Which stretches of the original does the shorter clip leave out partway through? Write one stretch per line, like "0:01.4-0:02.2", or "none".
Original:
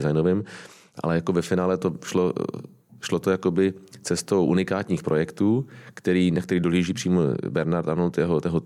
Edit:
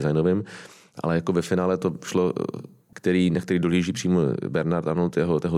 0:02.9-0:05.9